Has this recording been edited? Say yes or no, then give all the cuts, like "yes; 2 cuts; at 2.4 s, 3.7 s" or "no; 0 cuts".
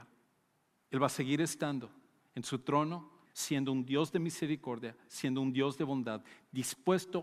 yes; 1 cut; at 3.3 s